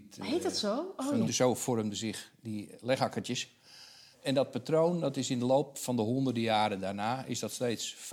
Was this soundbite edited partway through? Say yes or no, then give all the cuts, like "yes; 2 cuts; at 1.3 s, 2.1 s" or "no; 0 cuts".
yes; 2 cuts; at 1.3 s, 4.1 s